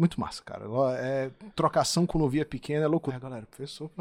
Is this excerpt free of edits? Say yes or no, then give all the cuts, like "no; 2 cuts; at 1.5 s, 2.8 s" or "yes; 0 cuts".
no; 1 cut; at 3.1 s